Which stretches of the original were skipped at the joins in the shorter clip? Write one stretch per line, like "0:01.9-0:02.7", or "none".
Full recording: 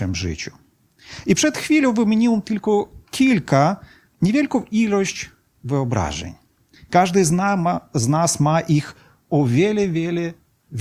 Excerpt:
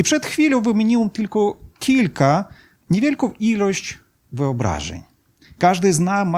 none